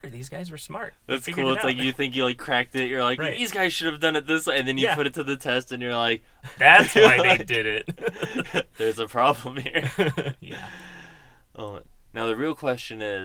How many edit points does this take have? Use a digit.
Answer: 1